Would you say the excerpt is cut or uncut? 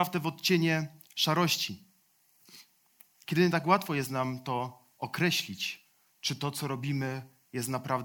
uncut